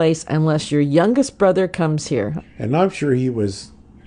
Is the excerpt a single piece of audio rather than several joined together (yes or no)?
no